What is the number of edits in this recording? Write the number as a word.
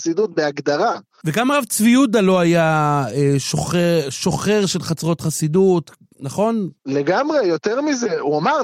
one